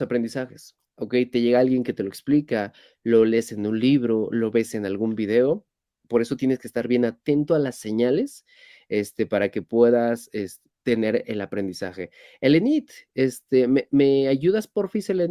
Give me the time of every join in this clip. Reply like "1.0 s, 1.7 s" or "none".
none

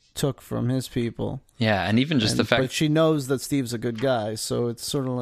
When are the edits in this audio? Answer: none

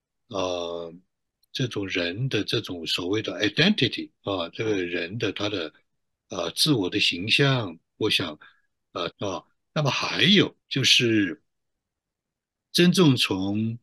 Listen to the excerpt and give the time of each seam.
8.0 s, 9.1 s, 10.6 s

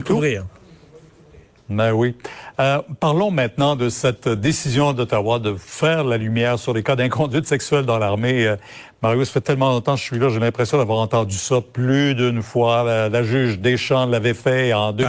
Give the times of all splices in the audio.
none

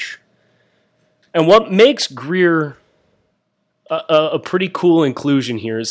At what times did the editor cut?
1.2 s

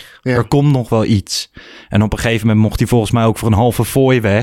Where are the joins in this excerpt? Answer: none

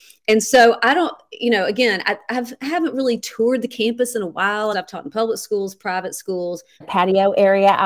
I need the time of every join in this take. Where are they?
4.7 s, 6.8 s

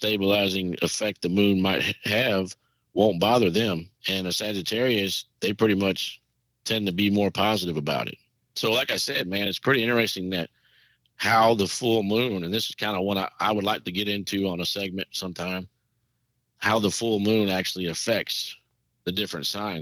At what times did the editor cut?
none

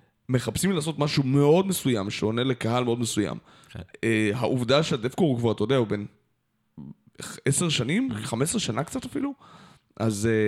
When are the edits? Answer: none

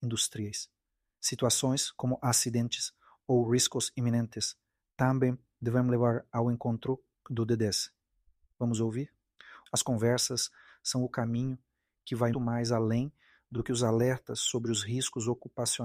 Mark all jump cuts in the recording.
8.5 s, 9.7 s, 12.3 s

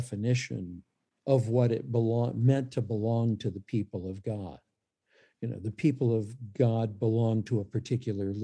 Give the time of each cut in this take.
none

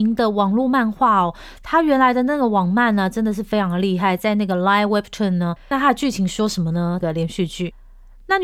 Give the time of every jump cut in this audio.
5.7 s, 7.0 s

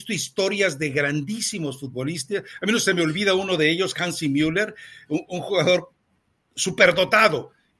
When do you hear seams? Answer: none

